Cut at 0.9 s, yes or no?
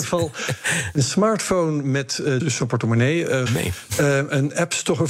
no